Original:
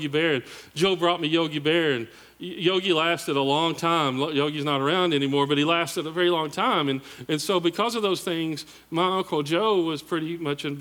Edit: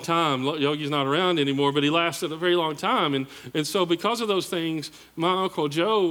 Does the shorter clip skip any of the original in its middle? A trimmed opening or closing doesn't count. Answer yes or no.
no